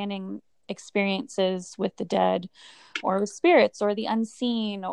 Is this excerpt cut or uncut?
cut